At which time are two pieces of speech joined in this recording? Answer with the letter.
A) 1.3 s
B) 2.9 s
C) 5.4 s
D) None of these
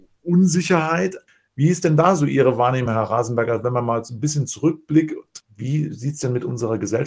D